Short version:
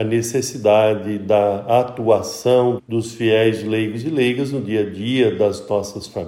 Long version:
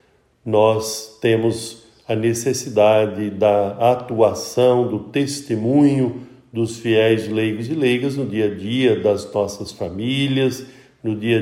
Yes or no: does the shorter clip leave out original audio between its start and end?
yes